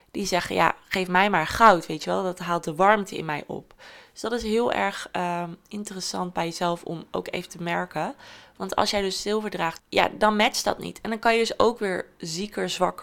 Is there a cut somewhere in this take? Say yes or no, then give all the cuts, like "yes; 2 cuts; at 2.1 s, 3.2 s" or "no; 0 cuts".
yes; 1 cut; at 9.8 s